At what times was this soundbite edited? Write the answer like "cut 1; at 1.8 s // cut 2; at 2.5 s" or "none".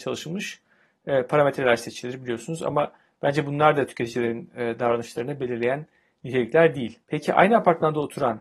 cut 1; at 7.0 s